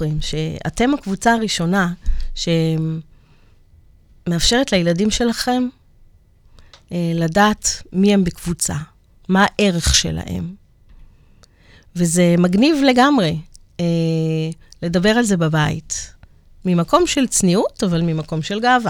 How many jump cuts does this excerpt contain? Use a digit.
0